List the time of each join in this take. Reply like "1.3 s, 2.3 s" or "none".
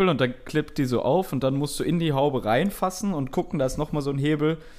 none